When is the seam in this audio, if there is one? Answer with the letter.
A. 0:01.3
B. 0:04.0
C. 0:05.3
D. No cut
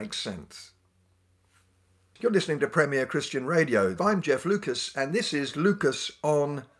B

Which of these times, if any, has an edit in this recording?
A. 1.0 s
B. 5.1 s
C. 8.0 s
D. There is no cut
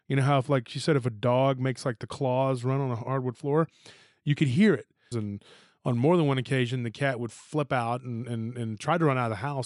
B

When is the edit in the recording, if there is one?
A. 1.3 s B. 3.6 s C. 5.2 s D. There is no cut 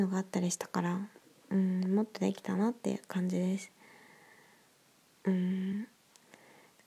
C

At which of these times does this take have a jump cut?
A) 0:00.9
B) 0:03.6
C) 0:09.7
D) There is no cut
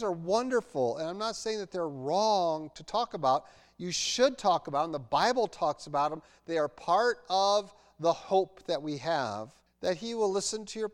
C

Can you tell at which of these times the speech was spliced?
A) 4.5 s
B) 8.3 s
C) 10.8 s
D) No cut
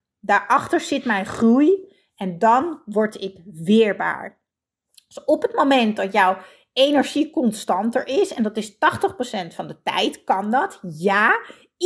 D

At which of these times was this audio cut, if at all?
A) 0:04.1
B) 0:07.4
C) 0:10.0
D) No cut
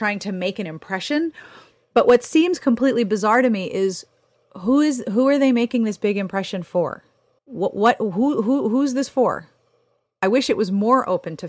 B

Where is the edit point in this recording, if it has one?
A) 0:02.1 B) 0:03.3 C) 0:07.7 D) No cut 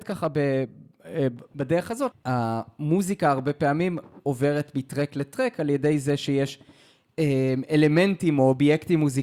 A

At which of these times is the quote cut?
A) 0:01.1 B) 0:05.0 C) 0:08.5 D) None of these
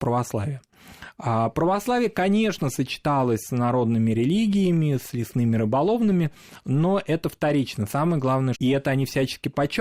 C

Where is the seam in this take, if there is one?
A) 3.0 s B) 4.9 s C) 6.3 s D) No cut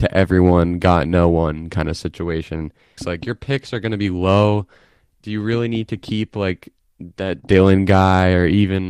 A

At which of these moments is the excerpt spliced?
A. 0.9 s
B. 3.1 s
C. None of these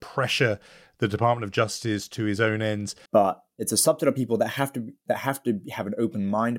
B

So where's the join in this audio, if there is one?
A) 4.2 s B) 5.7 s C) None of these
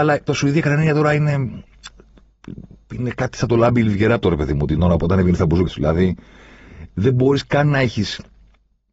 B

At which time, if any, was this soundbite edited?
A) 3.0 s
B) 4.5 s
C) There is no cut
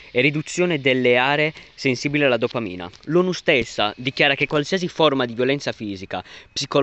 A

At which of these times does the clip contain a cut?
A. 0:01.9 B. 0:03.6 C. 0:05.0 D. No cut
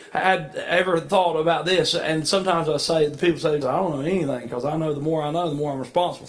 B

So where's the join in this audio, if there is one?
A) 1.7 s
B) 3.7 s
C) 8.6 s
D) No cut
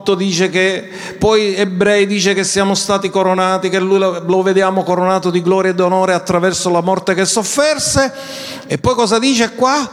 D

